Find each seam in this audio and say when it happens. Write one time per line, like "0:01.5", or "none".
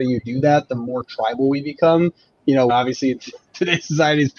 0:02.7